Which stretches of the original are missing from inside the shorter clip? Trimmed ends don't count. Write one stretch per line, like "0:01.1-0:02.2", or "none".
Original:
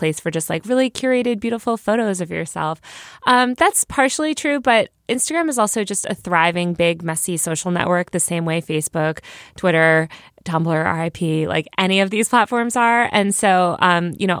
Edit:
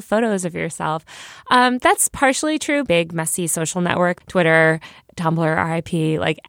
0:04.6-0:06.8
0:08.1-0:09.5

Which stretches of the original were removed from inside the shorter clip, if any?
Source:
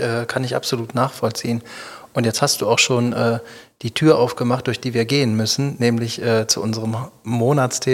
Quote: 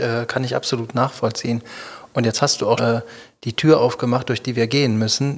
0:02.8-0:03.1

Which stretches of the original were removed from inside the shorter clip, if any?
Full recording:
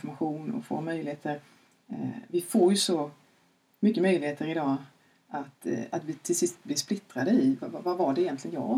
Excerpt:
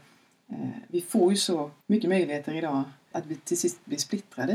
0:03.2-0:03.7
0:05.0-0:05.9

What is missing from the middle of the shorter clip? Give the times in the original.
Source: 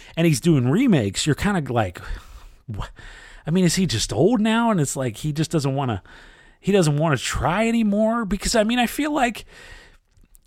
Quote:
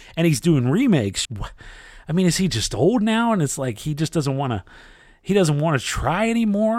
0:01.3-0:02.6

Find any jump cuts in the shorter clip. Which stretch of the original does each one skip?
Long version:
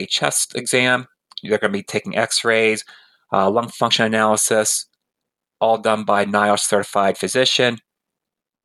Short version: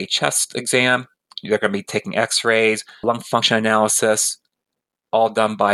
0:03.0-0:03.5

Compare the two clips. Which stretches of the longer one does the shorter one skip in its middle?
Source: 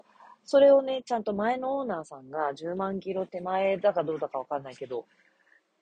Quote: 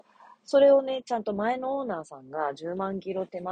none

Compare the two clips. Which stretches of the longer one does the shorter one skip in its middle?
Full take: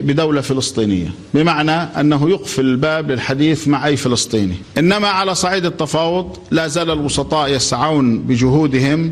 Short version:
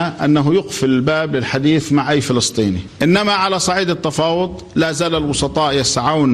none

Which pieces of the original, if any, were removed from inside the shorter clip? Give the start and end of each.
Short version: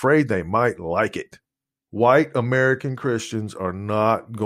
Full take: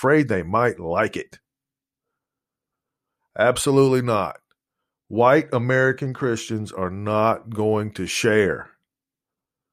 0:01.8-0:05.0

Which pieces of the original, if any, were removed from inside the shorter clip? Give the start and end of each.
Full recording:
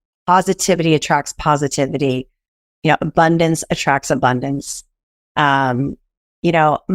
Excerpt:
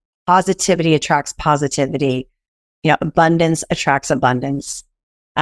none

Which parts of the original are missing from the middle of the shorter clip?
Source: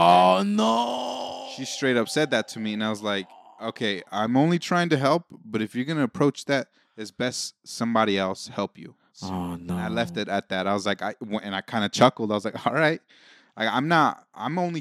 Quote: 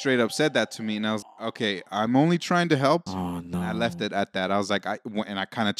0:03.0-0:03.4
0:05.3-0:09.2

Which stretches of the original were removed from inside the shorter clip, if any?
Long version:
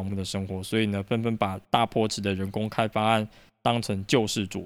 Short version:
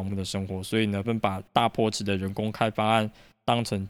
0:01.0-0:01.2

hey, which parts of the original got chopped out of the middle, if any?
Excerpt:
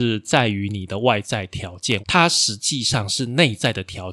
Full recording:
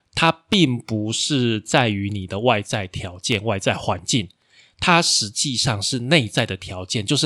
0:03.4-0:04.7

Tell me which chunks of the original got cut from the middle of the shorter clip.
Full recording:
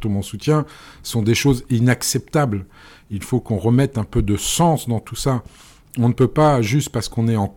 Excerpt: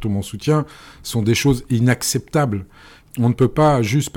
0:03.0-0:05.8

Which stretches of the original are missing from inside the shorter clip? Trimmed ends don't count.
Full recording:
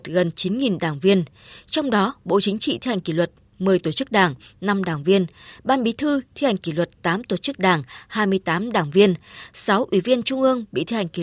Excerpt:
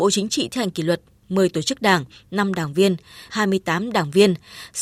0:05.6-0:08.1

